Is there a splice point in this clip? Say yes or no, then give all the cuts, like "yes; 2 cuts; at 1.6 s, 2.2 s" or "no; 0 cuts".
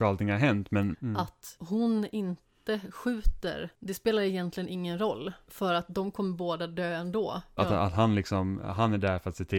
yes; 2 cuts; at 0.9 s, 7.6 s